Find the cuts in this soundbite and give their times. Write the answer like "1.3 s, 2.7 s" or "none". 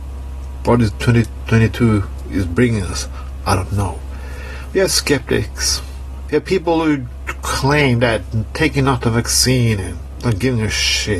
6.3 s